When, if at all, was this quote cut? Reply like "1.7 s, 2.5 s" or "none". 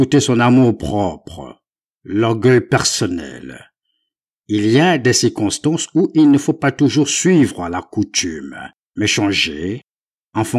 none